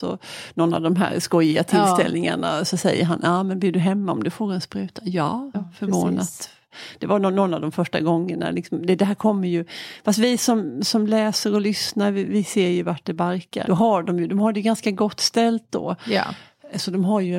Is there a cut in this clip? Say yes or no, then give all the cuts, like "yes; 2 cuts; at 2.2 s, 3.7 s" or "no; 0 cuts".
yes; 2 cuts; at 5.5 s, 13.6 s